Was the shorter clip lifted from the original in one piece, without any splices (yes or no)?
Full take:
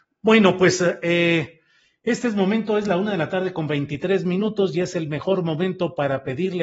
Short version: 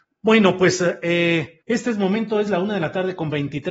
no